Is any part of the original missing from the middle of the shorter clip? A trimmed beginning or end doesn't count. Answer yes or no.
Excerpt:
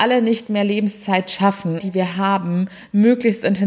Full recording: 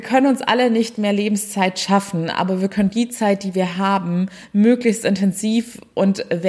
yes